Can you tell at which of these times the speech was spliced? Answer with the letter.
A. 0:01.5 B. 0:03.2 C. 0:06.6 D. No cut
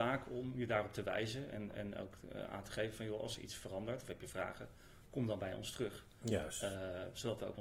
D